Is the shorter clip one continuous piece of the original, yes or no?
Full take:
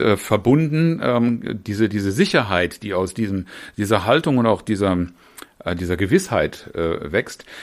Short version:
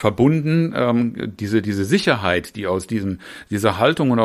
yes